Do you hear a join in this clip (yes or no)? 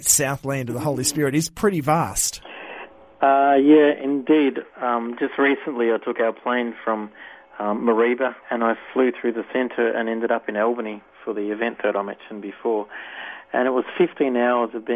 yes